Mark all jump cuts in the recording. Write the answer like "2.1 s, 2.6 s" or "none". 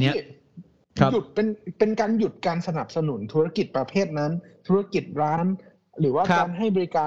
5.4 s